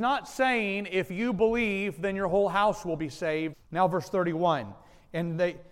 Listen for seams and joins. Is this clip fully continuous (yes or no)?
no